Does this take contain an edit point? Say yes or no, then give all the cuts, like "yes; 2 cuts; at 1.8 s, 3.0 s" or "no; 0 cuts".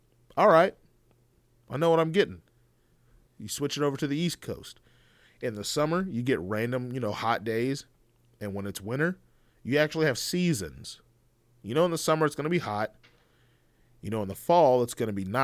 no; 0 cuts